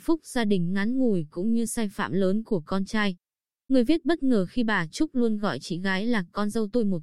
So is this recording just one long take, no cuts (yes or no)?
yes